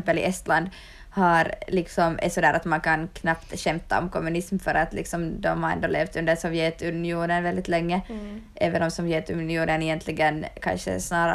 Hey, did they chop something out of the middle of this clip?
no; 0 cuts

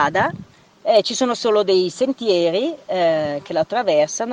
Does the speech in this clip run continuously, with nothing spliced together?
yes; 0 cuts

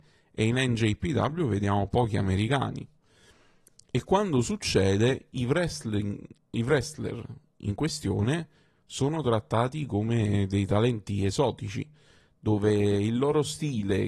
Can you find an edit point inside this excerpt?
no; 0 cuts

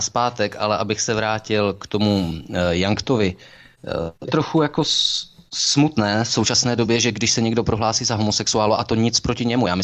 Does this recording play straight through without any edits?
yes; 0 cuts

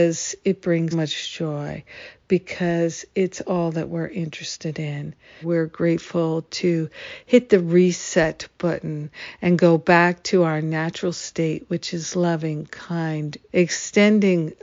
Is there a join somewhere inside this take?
yes; 3 cuts; at 0.9 s, 5.4 s, 13.5 s

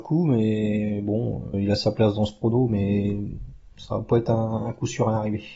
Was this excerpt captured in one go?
no; 1 cut; at 1.5 s

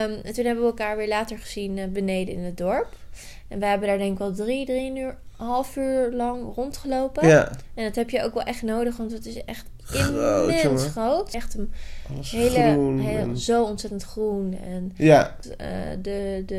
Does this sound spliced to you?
yes; 2 cuts; at 11.3 s, 15.4 s

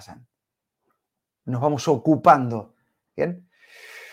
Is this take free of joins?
no; 1 cut; at 3.1 s

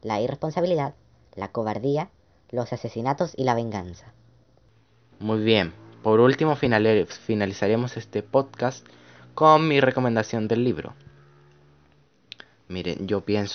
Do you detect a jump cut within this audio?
yes; 1 cut; at 5.1 s

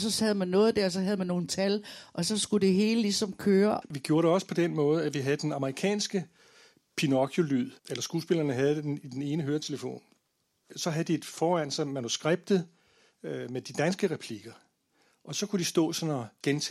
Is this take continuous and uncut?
no; 2 cuts; at 3.8 s, 7.8 s

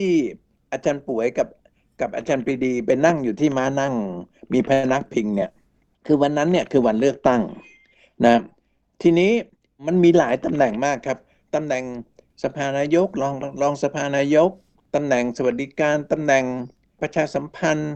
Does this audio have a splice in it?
no; 0 cuts

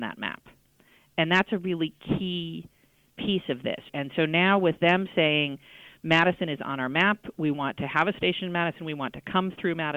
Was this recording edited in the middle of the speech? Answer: no; 0 cuts

